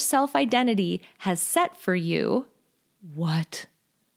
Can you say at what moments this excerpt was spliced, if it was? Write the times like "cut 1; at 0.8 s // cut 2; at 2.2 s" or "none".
cut 1; at 2.9 s